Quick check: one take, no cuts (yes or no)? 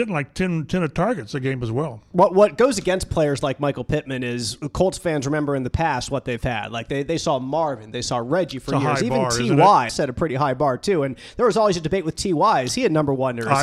no